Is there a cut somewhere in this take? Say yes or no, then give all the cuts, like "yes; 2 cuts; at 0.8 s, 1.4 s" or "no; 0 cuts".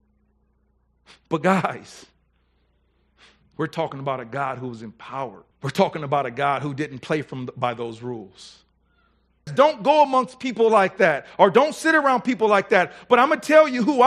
yes; 2 cuts; at 5.5 s, 9.5 s